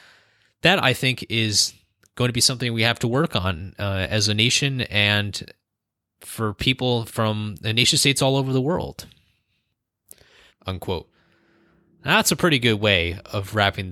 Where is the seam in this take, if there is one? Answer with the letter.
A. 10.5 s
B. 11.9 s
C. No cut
A